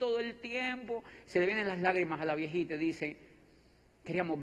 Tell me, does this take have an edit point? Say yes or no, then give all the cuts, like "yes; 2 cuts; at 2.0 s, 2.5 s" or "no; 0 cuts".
no; 0 cuts